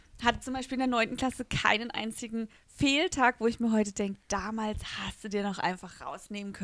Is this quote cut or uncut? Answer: uncut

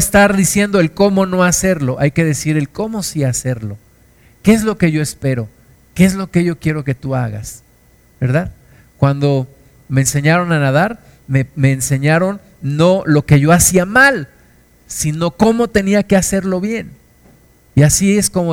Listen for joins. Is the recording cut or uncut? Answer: uncut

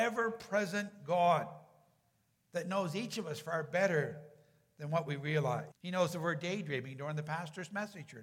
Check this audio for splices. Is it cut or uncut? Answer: cut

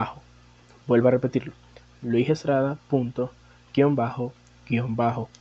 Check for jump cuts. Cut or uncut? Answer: uncut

